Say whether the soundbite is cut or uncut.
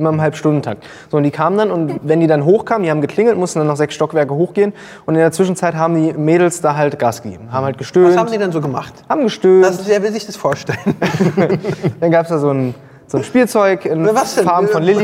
uncut